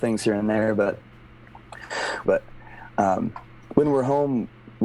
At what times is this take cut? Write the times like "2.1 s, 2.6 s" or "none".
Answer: 2.2 s

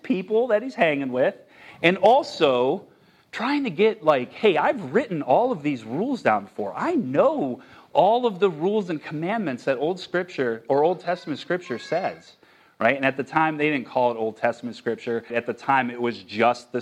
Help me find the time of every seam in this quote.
15.3 s

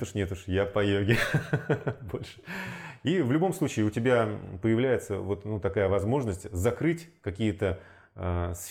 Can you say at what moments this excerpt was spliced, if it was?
none

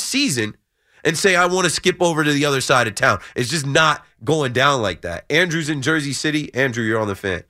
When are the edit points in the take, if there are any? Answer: none

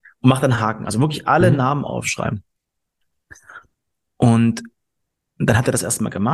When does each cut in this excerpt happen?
none

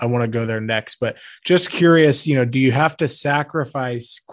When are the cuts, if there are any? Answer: none

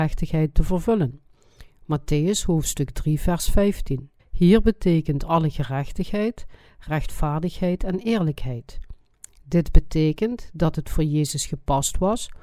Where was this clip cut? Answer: 4.2 s

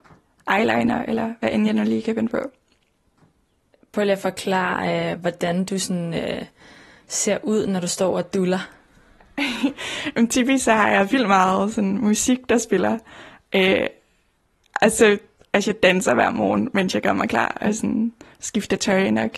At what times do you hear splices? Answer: none

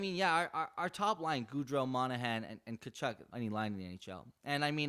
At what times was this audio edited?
3.3 s

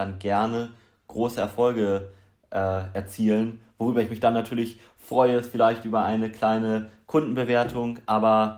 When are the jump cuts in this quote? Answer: none

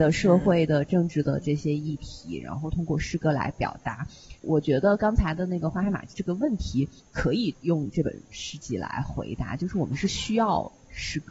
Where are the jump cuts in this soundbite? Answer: none

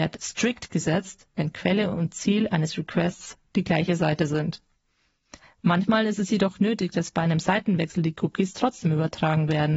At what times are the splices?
1.4 s

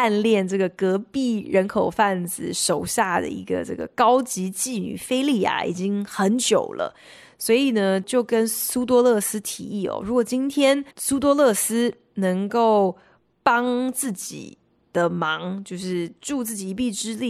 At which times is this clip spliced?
10.9 s

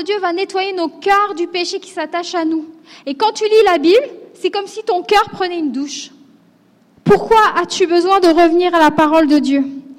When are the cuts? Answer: 6.8 s

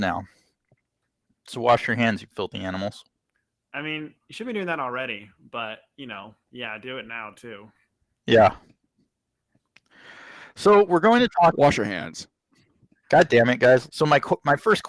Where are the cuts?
13.9 s

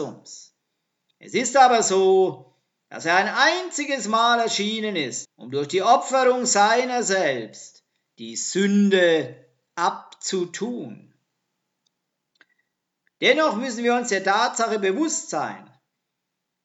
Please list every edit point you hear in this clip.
5.2 s, 13.1 s

